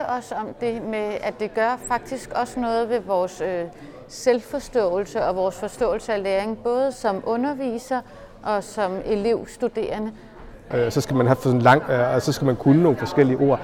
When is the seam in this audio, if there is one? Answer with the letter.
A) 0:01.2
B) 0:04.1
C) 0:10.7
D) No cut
C